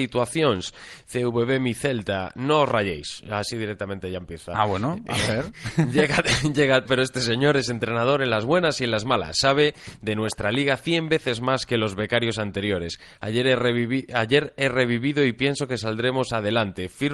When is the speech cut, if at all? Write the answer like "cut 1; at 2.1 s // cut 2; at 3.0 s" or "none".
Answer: cut 1; at 6.8 s

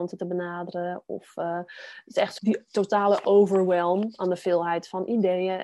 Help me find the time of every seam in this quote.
cut 1; at 2.4 s

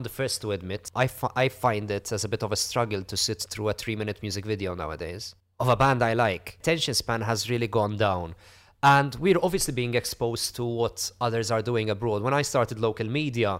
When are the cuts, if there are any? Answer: none

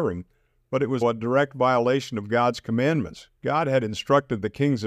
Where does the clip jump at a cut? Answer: cut 1; at 1.0 s

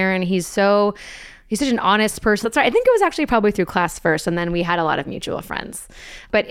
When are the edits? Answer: cut 1; at 2.4 s

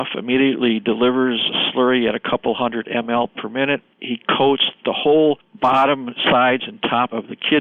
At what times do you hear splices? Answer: none

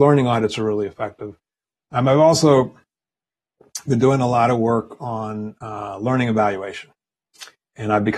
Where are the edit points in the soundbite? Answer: none

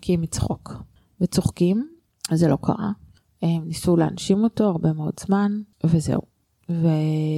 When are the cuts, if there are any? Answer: cut 1; at 2.1 s // cut 2; at 5.7 s

